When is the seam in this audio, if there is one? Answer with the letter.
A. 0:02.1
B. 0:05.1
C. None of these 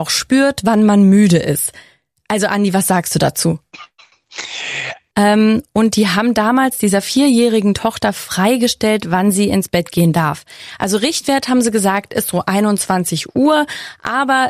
B